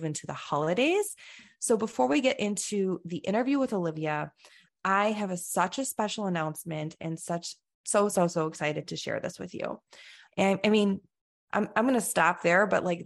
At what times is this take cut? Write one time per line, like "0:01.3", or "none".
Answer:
0:07.8
0:10.3